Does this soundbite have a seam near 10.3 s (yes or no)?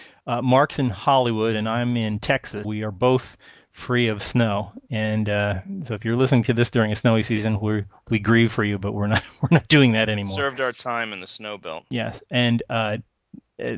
no